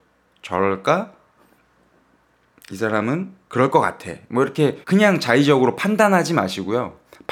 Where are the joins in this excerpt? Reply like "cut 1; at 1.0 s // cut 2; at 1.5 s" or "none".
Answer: cut 1; at 3.4 s // cut 2; at 4.8 s